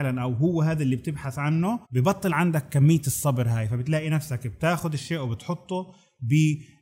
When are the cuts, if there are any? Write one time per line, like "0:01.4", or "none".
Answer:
0:01.8